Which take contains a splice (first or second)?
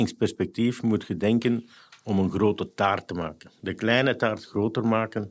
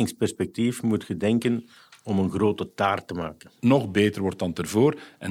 second